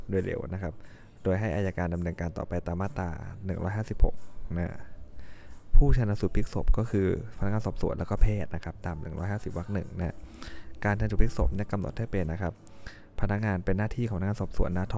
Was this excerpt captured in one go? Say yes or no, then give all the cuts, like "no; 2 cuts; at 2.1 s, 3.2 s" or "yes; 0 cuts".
no; 1 cut; at 12.3 s